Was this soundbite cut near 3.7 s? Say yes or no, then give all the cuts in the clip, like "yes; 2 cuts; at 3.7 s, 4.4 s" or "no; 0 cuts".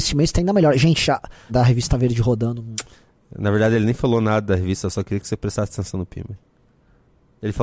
no; 1 cut; at 1.5 s